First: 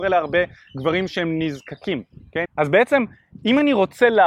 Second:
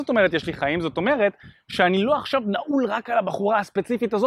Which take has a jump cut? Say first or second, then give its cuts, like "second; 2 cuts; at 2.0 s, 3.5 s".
first; 1 cut; at 2.5 s